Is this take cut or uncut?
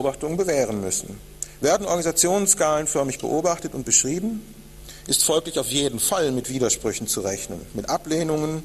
cut